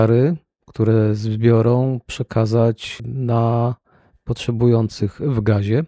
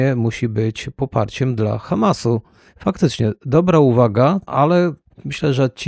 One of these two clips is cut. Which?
second; 1 cut; at 4.5 s

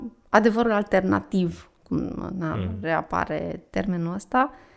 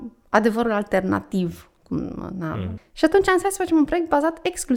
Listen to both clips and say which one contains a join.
second; 1 cut; at 2.8 s

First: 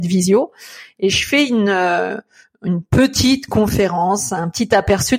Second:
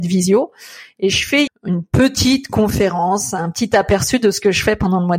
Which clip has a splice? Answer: second; 1 cut; at 1.5 s

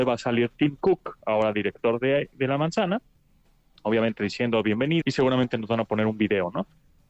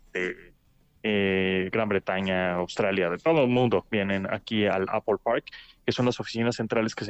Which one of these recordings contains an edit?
first; 1 cut; at 5.0 s

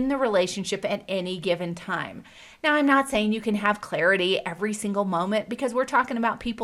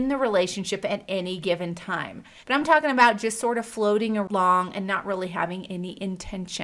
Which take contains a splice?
second; 1 cut; at 2.4 s

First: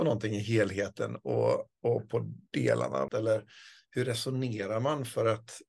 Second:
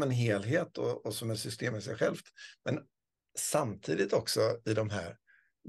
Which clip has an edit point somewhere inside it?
first; 1 cut; at 3.1 s

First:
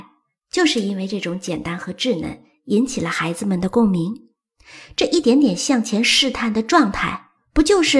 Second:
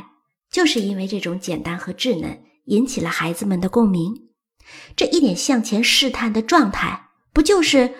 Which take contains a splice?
second; 1 cut; at 5.2 s

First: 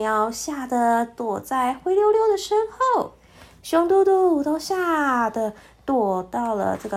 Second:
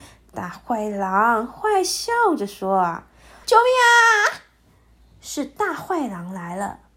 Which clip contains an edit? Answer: second; 1 cut; at 3.4 s

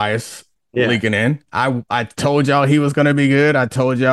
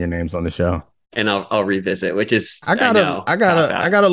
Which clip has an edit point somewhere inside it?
second; 1 cut; at 1.0 s

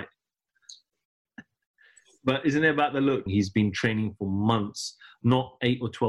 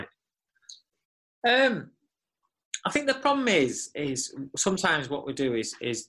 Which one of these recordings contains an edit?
first; 2 cuts; at 1.3 s, 3.3 s

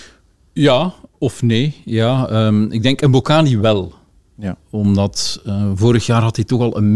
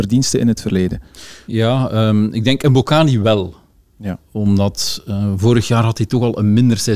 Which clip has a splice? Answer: second; 1 cut; at 1.5 s

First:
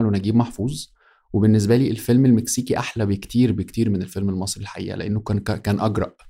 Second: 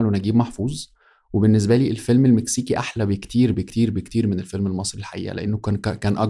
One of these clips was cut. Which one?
first; 1 cut; at 3.5 s

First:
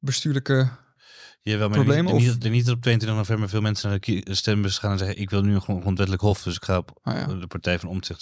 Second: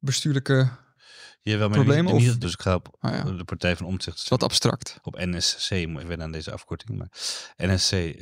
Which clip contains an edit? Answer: second; 2 cuts; at 2.4 s, 6.0 s

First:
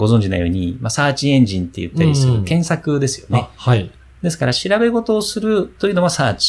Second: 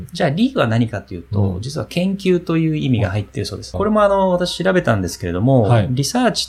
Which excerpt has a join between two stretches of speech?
second; 1 cut; at 3.7 s

